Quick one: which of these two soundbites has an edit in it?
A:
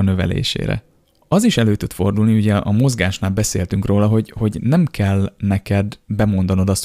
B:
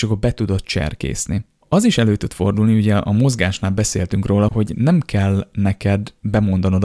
B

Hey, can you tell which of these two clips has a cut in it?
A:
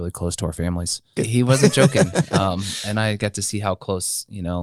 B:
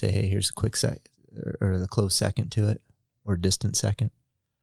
A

